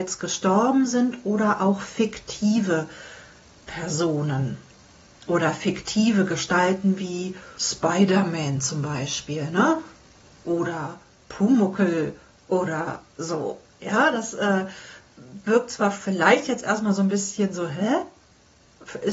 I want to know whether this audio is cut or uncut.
uncut